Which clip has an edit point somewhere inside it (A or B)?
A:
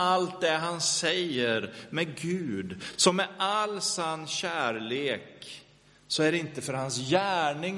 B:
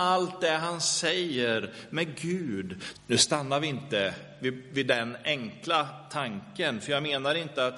B